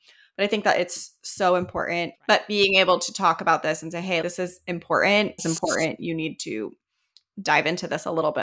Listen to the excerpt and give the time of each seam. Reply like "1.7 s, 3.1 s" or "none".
2.1 s, 4.2 s, 5.4 s